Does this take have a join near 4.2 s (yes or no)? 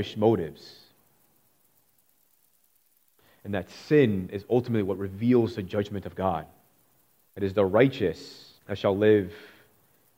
no